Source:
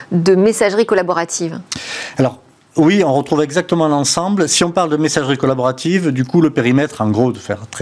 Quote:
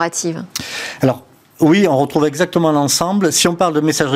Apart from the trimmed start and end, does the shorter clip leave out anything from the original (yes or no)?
no